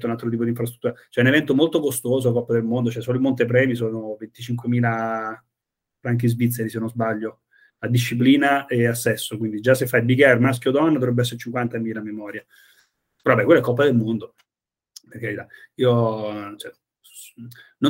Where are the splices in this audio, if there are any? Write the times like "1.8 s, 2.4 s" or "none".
none